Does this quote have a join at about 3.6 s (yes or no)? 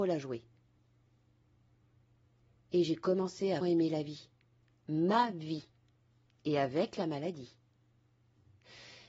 yes